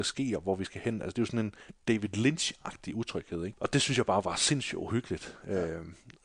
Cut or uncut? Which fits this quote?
cut